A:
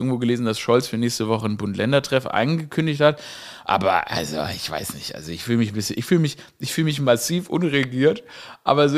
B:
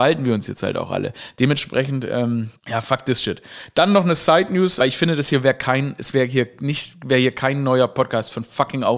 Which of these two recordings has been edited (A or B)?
B